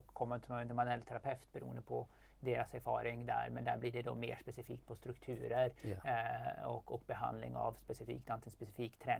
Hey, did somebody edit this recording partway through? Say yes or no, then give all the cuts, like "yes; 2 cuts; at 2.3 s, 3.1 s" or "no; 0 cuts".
no; 0 cuts